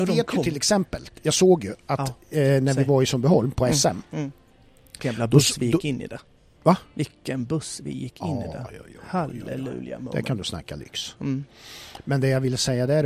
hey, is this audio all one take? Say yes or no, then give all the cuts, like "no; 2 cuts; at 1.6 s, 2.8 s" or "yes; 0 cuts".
yes; 0 cuts